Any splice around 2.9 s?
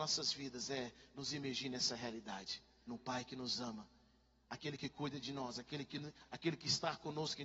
yes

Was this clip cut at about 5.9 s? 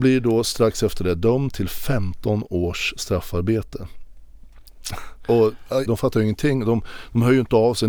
yes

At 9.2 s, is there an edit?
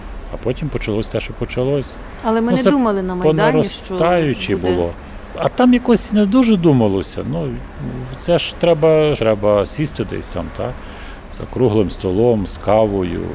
yes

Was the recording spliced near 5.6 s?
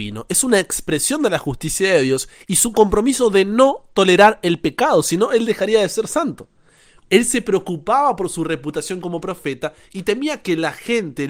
no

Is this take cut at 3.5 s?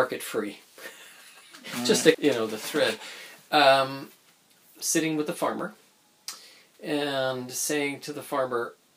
no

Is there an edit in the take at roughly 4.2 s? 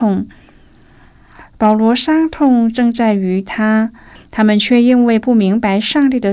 yes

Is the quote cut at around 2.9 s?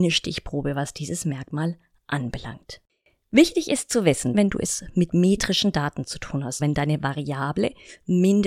no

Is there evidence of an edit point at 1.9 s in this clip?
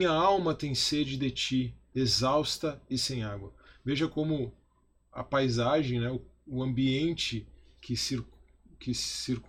yes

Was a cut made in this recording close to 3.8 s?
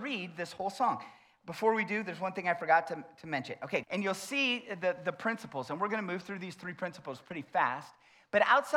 yes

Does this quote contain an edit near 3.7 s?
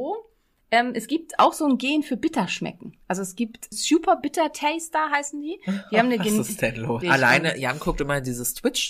yes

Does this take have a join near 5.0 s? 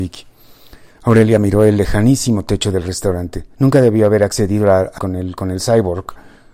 yes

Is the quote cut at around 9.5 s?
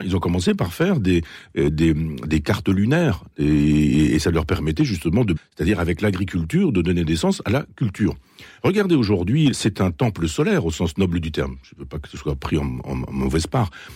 yes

